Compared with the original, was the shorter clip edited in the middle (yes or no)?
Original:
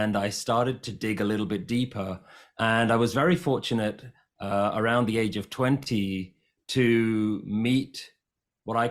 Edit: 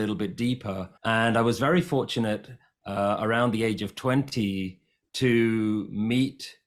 yes